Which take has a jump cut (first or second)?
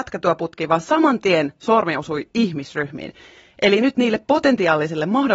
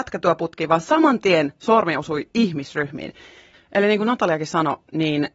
second